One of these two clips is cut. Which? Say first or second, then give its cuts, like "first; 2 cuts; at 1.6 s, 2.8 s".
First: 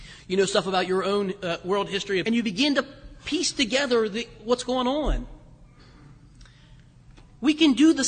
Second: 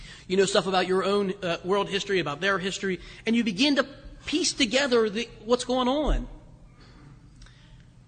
first; 1 cut; at 2.2 s